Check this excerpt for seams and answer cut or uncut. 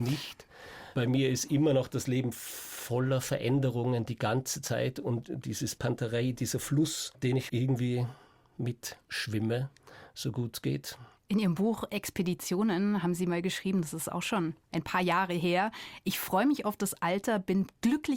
cut